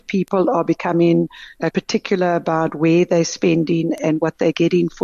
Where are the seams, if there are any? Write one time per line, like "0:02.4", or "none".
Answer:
0:01.7